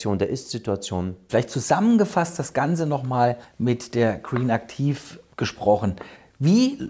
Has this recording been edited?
yes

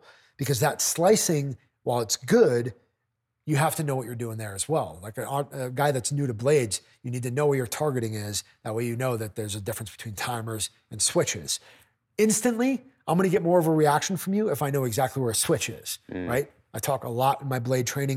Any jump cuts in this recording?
no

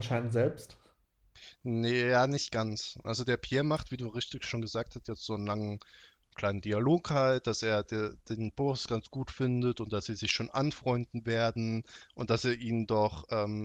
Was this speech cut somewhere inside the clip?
yes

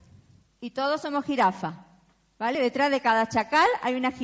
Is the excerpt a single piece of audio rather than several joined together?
yes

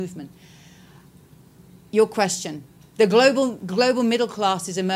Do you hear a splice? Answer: no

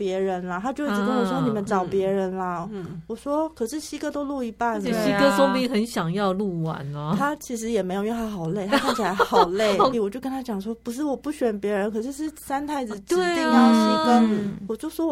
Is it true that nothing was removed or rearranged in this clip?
no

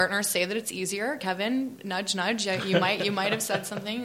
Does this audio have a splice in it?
no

